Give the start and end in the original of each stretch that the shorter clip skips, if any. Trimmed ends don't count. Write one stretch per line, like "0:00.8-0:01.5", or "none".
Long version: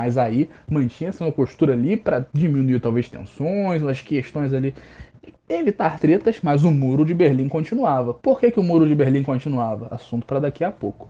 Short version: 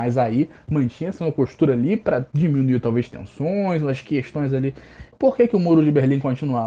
0:05.1-0:08.2

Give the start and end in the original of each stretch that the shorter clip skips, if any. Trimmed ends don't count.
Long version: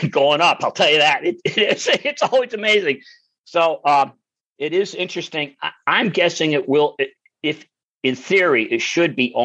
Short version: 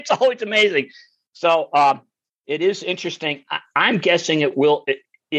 none

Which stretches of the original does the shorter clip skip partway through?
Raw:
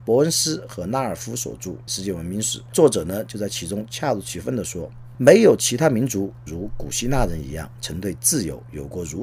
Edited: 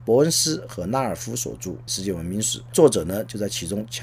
none

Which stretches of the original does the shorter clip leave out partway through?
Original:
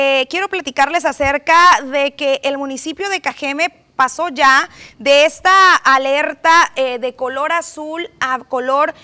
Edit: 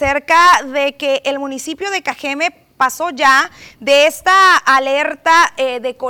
none

